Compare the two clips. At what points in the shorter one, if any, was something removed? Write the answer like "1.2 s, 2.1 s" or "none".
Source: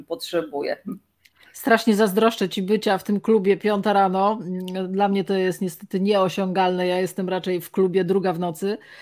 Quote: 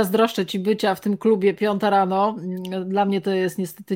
none